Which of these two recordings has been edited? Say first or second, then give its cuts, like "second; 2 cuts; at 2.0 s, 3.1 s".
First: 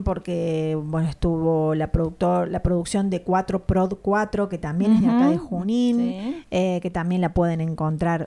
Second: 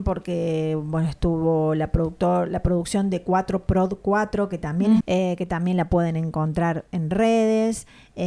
second; 1 cut; at 5.0 s